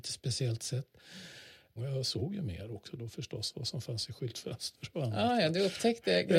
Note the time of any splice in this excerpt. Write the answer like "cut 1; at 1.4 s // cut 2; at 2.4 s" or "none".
cut 1; at 1.8 s